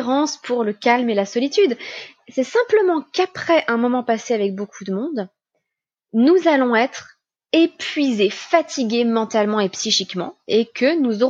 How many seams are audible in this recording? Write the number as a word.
zero